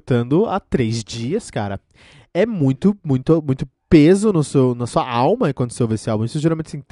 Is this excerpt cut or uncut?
uncut